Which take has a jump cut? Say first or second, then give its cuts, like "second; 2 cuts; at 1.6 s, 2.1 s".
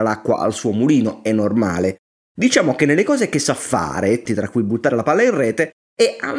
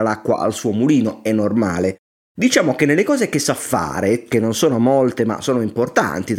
first; 1 cut; at 4.3 s